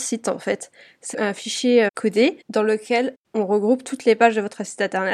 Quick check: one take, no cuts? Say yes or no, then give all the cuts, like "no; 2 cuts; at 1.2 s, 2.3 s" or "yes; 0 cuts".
no; 2 cuts; at 1.1 s, 2.4 s